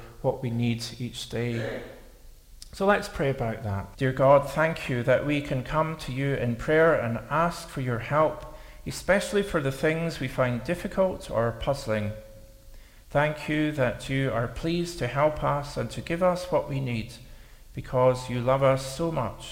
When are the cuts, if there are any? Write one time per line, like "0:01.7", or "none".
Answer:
0:03.9